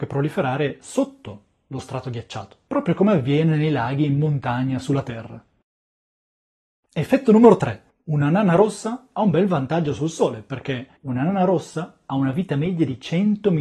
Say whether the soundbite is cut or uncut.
cut